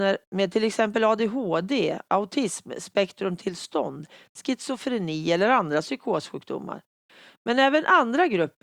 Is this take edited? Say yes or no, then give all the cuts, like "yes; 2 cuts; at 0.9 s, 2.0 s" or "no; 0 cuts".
no; 0 cuts